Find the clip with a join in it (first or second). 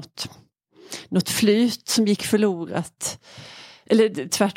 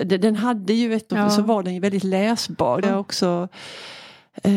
second